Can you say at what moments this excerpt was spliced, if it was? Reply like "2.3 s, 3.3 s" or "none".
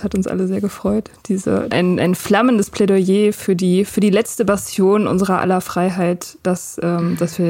1.7 s